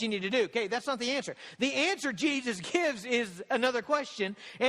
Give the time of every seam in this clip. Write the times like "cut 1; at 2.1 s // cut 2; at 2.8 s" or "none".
none